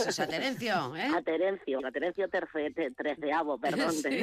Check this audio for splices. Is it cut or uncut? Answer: cut